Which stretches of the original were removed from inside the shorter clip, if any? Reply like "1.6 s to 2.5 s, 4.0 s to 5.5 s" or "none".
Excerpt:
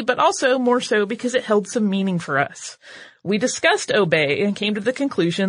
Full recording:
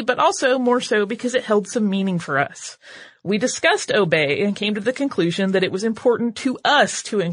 none